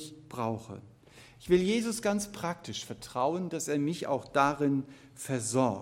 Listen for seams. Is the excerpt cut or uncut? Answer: uncut